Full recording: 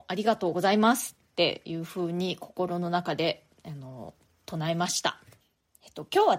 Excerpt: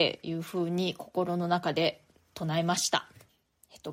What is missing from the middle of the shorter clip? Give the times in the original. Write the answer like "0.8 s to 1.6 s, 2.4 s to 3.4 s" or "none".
3.6 s to 4.3 s